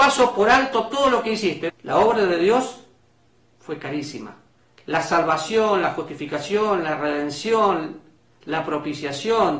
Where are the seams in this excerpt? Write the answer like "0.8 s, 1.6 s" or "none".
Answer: 1.7 s